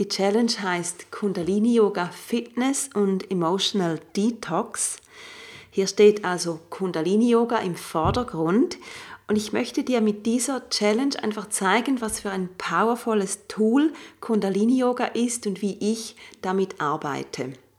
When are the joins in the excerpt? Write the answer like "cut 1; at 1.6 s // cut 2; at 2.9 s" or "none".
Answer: none